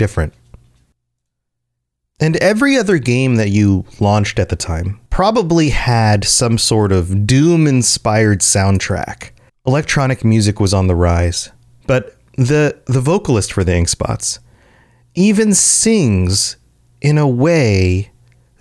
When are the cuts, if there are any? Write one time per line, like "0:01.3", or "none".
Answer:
0:05.1
0:09.5
0:11.8